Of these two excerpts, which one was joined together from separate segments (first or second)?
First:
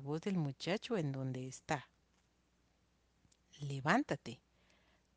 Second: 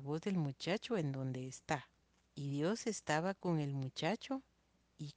second